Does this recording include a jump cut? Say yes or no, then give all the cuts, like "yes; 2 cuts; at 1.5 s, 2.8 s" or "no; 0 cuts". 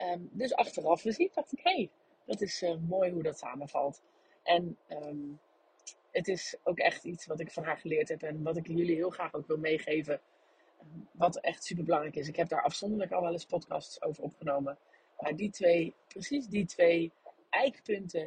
no; 0 cuts